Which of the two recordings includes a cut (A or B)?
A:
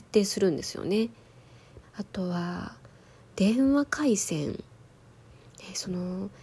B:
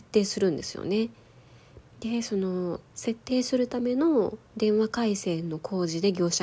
A